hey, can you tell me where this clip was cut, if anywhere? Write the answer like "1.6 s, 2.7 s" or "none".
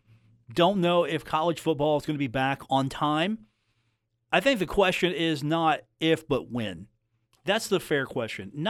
none